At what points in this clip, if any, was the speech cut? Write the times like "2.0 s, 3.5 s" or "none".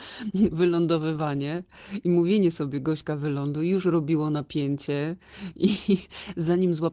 none